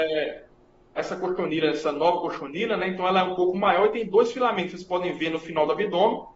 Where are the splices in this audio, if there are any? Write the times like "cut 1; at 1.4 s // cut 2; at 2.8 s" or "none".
cut 1; at 1.0 s